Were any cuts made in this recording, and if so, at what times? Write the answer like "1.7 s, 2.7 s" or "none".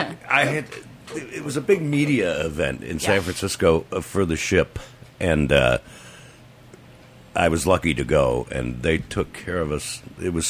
none